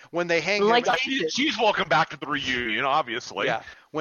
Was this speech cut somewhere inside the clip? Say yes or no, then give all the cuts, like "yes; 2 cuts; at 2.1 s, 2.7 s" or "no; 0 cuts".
no; 0 cuts